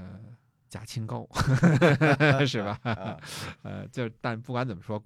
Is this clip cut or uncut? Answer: uncut